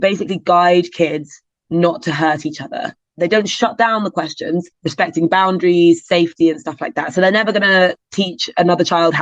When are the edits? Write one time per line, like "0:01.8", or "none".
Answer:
0:04.7